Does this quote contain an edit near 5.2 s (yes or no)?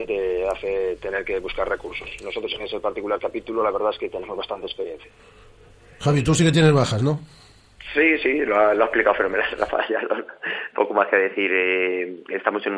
no